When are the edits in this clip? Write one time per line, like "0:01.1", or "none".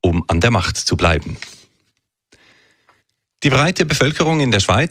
none